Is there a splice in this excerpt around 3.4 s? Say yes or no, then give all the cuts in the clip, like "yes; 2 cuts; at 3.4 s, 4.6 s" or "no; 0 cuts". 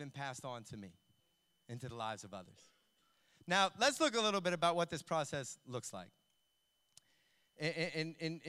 no; 0 cuts